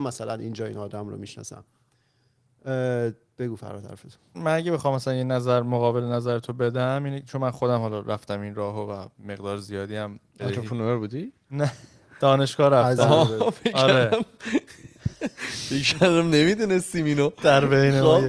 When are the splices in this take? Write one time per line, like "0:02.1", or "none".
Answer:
0:04.3
0:09.1